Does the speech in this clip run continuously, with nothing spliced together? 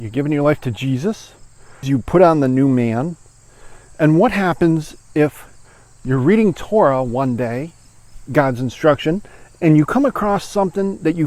no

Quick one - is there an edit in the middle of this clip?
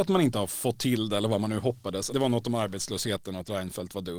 yes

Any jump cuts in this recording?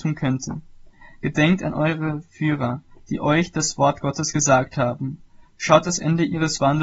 no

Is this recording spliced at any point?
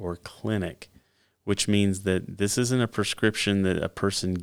no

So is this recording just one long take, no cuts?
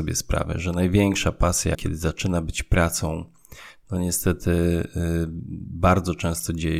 no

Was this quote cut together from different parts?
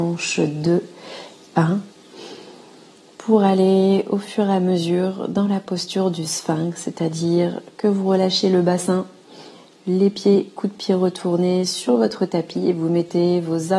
no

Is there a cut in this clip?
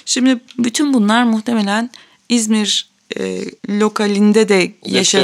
yes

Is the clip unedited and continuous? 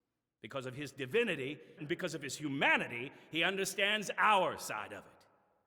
no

